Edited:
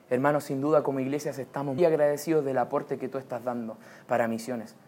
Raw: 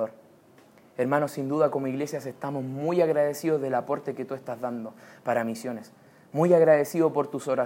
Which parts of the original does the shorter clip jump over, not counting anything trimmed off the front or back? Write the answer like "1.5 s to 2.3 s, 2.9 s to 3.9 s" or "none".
2.7 s to 2.9 s